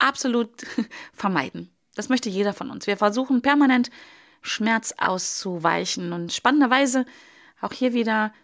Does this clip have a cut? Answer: no; 0 cuts

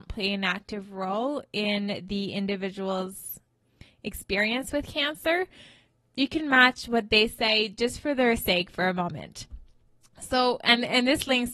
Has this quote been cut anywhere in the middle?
no; 0 cuts

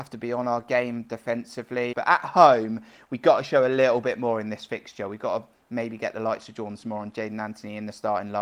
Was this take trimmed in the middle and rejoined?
yes; 1 cut; at 1.9 s

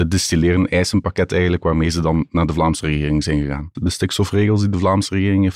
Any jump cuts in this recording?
yes; 1 cut; at 3.7 s

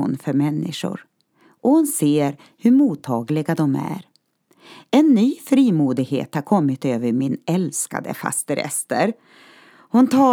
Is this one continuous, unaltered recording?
yes; 0 cuts

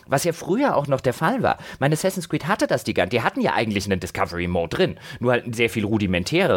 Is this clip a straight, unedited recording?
no; 1 cut; at 4.7 s

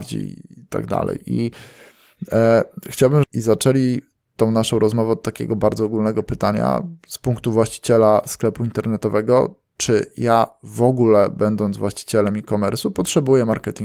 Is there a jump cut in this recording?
yes; 1 cut; at 3.2 s

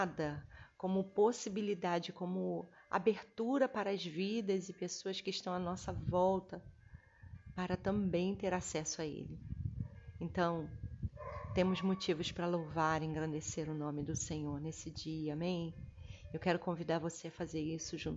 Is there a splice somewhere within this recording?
no; 0 cuts

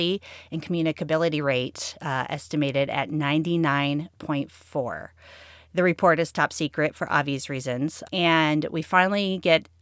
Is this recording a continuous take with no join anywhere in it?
no; 1 cut; at 8.1 s

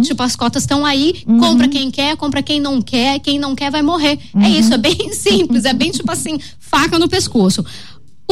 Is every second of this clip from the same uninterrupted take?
yes; 0 cuts

